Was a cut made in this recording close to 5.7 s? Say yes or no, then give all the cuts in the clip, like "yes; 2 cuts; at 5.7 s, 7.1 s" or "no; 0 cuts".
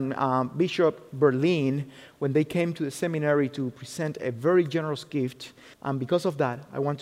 yes; 1 cut; at 5.7 s